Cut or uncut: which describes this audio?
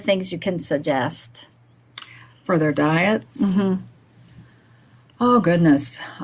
uncut